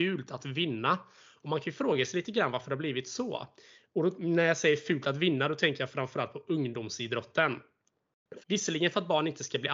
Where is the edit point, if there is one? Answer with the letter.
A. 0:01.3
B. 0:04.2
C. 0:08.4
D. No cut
C